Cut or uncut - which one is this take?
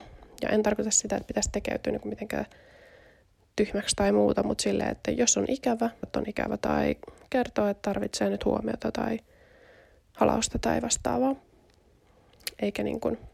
cut